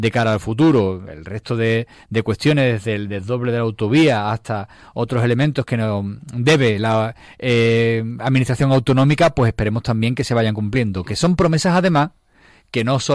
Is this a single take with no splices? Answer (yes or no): yes